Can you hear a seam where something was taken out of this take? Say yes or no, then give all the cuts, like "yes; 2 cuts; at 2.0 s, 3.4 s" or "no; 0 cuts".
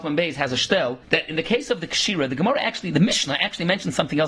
yes; 1 cut; at 1.0 s